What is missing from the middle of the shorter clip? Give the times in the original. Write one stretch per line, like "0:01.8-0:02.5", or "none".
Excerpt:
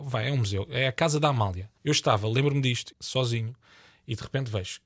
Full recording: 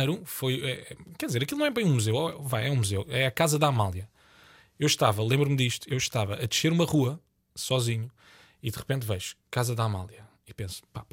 0:04.2-0:04.7
0:05.9-0:07.5